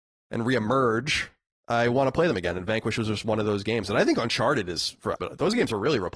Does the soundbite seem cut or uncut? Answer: cut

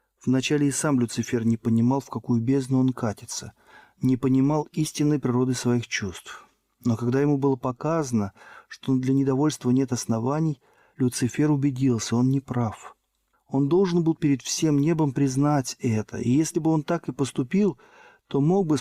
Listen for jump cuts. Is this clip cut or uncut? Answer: cut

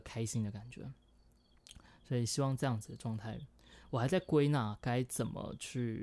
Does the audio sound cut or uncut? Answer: uncut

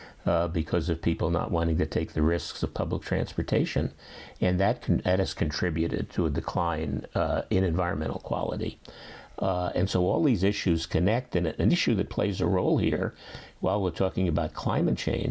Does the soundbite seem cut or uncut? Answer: uncut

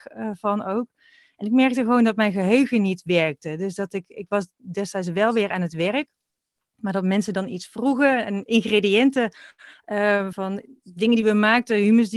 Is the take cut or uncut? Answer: cut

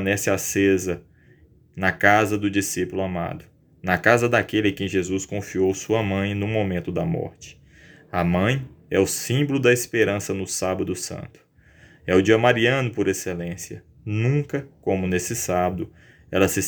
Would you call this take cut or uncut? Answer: uncut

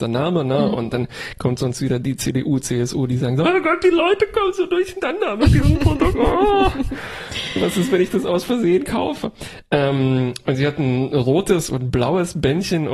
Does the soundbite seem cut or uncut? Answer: uncut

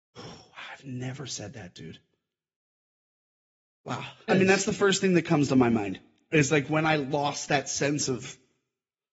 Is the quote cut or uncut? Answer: cut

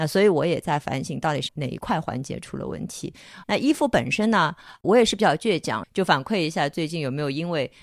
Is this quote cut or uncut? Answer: cut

